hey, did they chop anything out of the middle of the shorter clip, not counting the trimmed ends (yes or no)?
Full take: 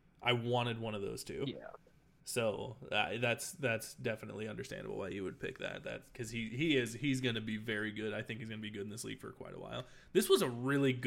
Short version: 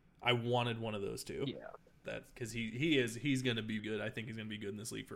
yes